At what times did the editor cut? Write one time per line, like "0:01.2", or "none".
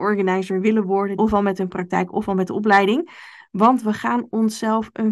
0:01.2